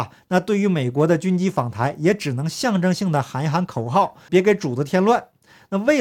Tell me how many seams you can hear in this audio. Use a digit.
1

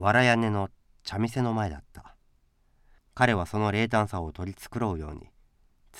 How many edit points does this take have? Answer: 1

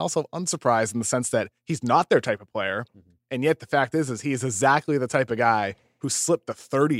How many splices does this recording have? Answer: 0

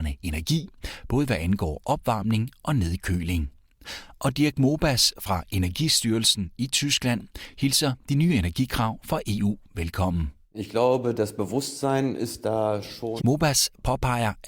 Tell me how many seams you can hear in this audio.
1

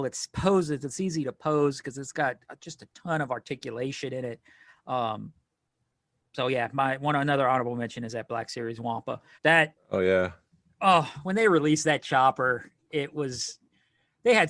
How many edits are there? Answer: 1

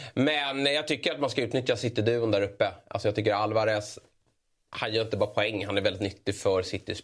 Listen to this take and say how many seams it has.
0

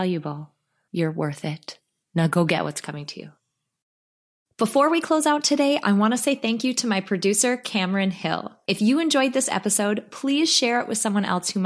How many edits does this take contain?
1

